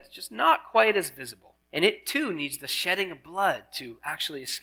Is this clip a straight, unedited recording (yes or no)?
no